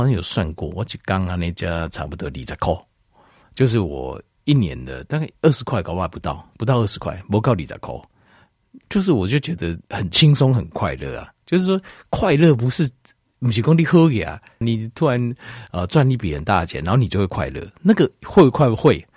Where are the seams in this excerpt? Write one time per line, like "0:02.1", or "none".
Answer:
0:14.6